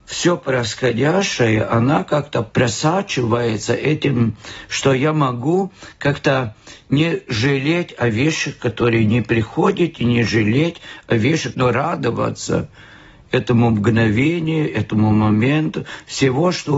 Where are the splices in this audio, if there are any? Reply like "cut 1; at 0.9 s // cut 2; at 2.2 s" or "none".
cut 1; at 11.5 s